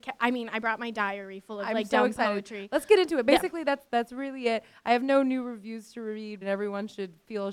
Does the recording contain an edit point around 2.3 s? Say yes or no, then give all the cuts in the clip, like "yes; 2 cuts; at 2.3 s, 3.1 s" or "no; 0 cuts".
no; 2 cuts; at 3.9 s, 6.4 s